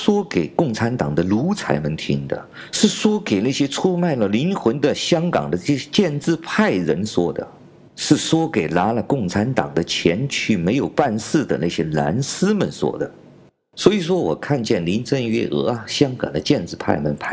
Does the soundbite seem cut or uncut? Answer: uncut